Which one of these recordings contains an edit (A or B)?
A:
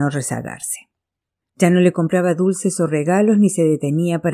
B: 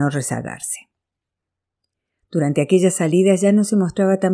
A